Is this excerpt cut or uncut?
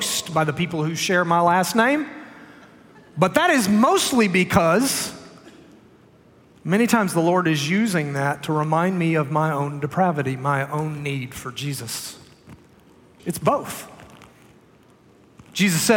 cut